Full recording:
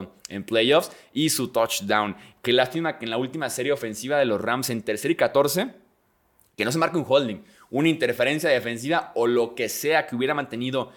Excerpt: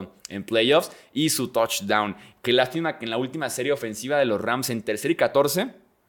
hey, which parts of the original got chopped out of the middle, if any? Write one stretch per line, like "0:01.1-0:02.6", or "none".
none